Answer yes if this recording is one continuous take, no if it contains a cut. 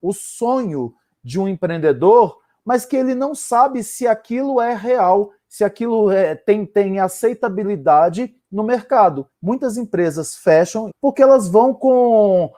no